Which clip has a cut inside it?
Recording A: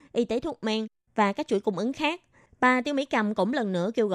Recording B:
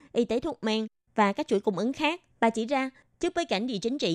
B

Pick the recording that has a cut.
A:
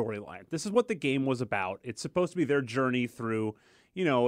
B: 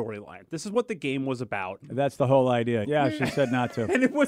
B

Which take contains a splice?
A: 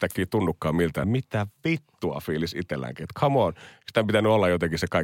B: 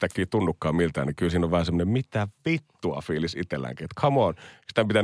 A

